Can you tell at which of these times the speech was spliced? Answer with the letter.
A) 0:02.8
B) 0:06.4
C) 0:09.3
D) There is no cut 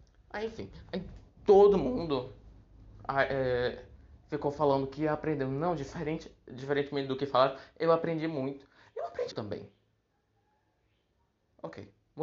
C